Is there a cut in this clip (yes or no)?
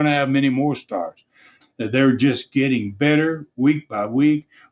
yes